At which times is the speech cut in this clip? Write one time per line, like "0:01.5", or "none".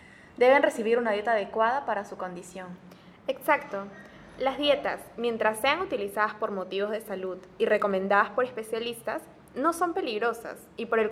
none